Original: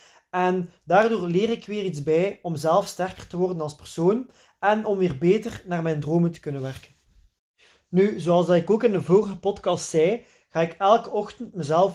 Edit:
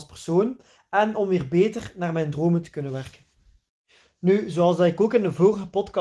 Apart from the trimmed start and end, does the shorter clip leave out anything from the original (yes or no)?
no